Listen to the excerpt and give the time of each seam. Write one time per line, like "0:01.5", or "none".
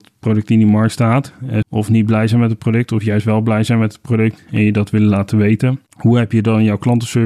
0:01.6
0:05.9